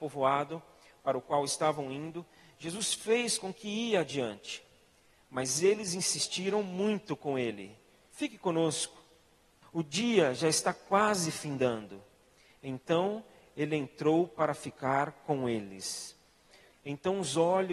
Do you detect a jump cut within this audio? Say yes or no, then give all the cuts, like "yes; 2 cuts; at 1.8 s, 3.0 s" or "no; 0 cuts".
yes; 2 cuts; at 9.6 s, 16.7 s